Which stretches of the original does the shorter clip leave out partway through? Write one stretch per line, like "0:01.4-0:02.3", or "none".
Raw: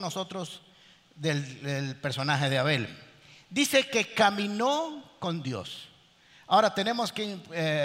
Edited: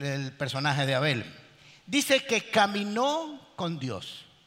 none